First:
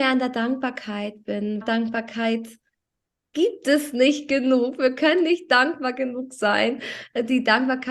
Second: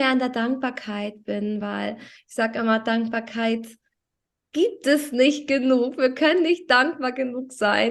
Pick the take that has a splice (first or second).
first